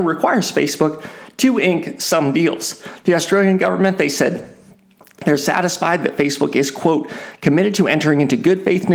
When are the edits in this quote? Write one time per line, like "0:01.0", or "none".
none

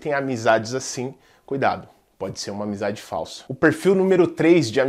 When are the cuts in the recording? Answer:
none

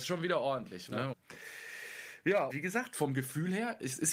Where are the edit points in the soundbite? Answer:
0:01.1
0:02.5

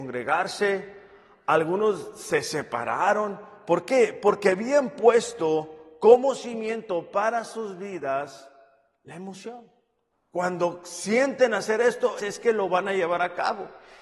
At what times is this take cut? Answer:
0:10.1
0:12.2

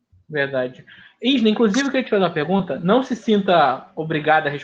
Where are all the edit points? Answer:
none

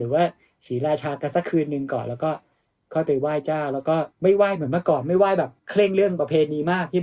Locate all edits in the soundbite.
0:04.1
0:05.6

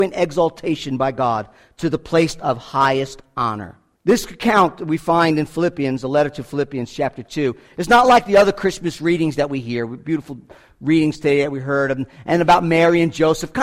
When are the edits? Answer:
0:04.0

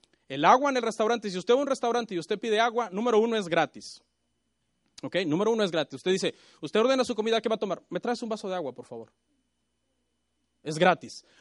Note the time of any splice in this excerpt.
none

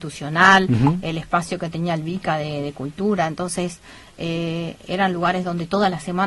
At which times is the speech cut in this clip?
none

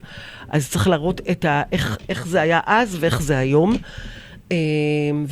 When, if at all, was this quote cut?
0:04.4

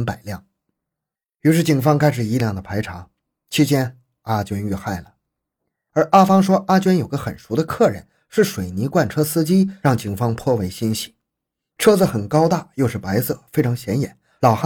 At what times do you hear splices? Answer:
0:02.4
0:11.7

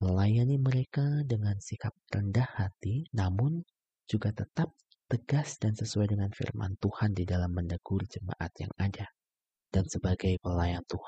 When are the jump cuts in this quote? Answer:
0:09.5

